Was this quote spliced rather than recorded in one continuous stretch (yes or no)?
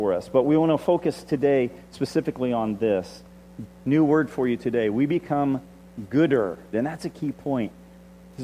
yes